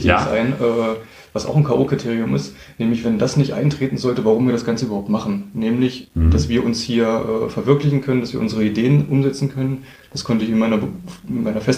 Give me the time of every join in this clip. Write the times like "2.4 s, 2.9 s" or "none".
none

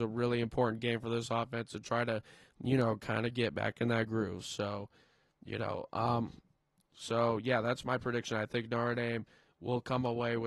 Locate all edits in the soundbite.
none

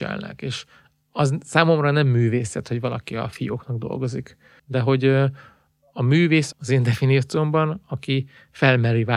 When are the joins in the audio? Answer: 4.6 s, 6.5 s

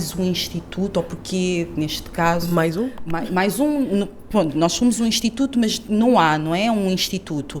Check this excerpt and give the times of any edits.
none

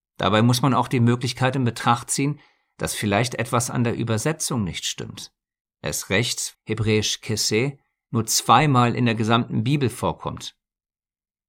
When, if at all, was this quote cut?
6.5 s

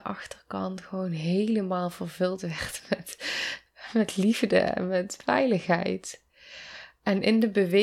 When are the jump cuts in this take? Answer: none

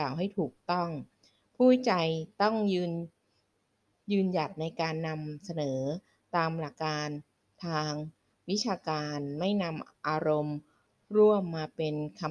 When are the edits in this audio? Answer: 6.7 s

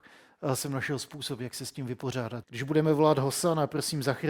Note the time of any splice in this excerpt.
2.4 s

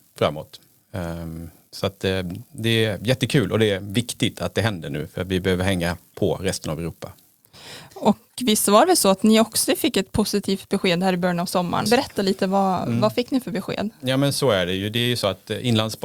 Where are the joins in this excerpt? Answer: 11.9 s

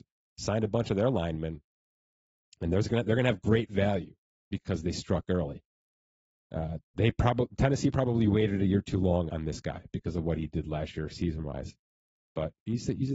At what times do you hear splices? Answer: 9.3 s

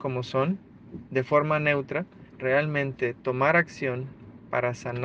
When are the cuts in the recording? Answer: 2.3 s

